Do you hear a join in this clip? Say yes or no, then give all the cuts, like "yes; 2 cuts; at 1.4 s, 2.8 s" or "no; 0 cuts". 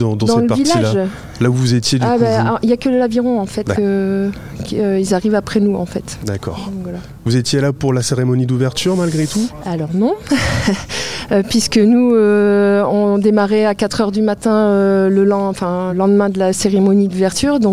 yes; 2 cuts; at 3.7 s, 15.9 s